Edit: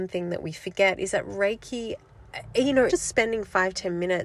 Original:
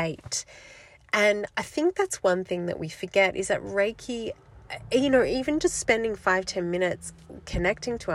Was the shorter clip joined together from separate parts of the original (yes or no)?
yes